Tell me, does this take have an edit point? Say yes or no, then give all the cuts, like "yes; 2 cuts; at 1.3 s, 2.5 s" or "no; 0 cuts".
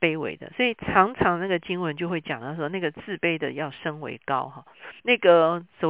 yes; 1 cut; at 5.0 s